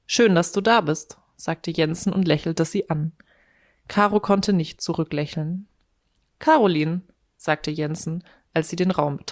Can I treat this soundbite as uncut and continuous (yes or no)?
no